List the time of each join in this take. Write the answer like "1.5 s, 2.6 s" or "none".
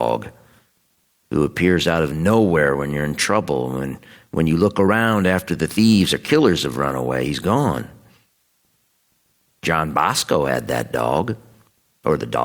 none